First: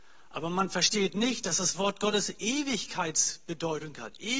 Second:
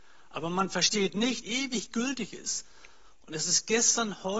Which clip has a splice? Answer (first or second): second